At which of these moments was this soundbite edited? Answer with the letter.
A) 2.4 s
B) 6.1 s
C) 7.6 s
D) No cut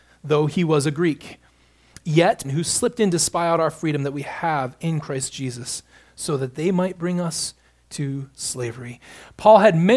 A